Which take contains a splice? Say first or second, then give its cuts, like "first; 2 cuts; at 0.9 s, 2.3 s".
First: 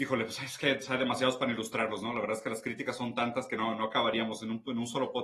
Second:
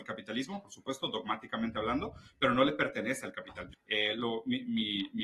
second; 1 cut; at 3.7 s